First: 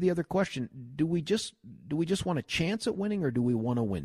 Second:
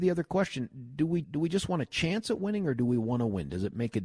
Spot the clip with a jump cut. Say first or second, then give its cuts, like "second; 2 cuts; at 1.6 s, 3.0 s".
second; 1 cut; at 1.2 s